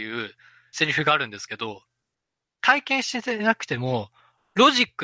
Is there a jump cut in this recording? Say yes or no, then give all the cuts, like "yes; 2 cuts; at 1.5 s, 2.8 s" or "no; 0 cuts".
yes; 1 cut; at 2.6 s